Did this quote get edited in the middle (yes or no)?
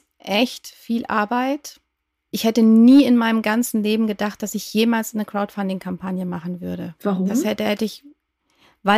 no